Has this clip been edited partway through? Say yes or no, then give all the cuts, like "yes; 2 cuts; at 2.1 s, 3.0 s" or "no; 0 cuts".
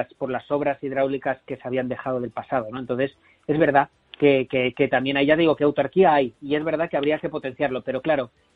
no; 0 cuts